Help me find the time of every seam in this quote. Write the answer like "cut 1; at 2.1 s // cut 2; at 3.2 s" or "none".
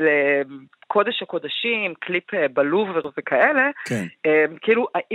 none

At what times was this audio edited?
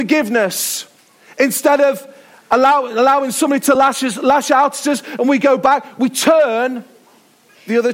none

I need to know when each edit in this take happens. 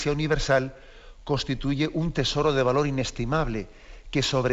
none

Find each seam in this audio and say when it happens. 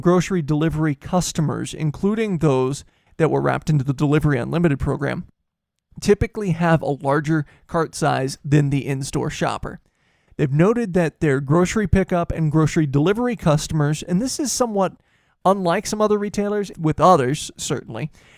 cut 1; at 10.3 s // cut 2; at 16.7 s

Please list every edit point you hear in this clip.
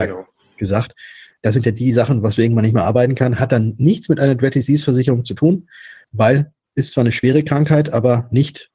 none

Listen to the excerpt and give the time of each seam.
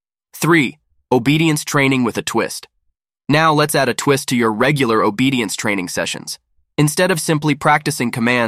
none

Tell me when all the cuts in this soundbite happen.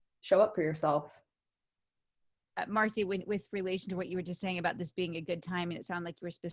cut 1; at 2.5 s

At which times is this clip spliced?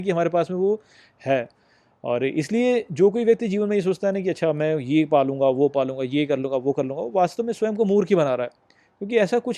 none

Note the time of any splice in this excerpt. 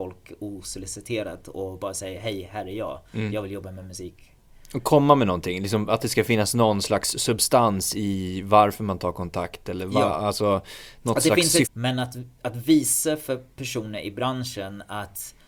cut 1; at 11.6 s

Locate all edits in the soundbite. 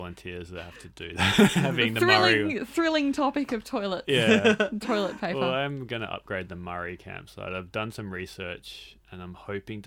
none

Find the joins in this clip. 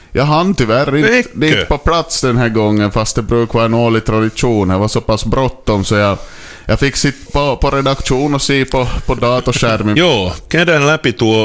cut 1; at 7.3 s // cut 2; at 9.9 s

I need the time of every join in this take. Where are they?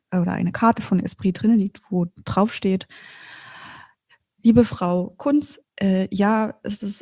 cut 1; at 5.6 s

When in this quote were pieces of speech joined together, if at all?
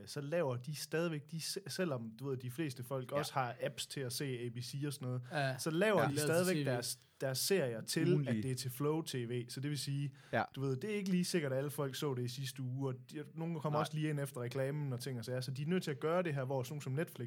none

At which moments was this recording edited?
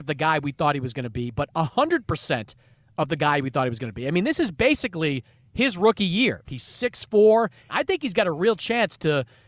cut 1; at 6.4 s // cut 2; at 7.7 s

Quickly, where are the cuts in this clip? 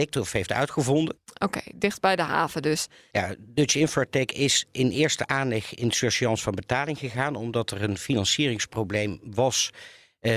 cut 1; at 1.2 s // cut 2; at 3.1 s

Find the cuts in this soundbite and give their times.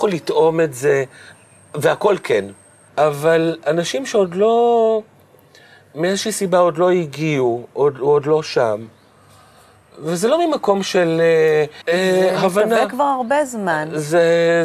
cut 1; at 2.9 s // cut 2; at 11.8 s

